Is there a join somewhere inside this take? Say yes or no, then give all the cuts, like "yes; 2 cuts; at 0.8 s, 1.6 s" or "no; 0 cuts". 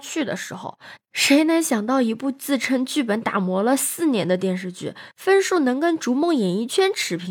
yes; 1 cut; at 1.0 s